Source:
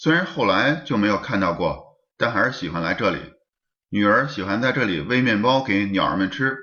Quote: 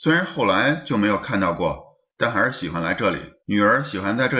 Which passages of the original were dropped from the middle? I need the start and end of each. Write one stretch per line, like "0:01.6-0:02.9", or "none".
0:03.4-0:03.8